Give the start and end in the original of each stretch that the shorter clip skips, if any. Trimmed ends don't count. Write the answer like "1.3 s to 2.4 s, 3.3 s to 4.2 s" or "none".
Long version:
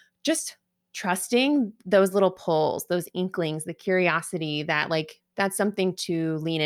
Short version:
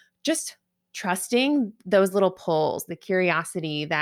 2.9 s to 3.6 s